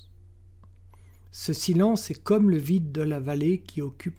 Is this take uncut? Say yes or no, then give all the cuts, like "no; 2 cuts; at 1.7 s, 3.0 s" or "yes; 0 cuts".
yes; 0 cuts